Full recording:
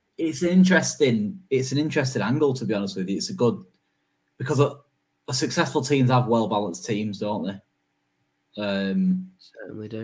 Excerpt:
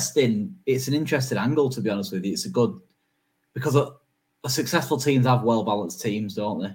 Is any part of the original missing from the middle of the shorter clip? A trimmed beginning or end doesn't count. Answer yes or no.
no